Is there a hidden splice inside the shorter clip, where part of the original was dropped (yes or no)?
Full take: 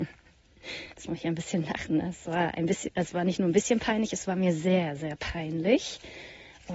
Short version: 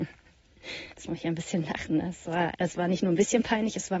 yes